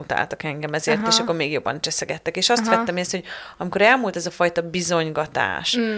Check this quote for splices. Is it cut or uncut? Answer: uncut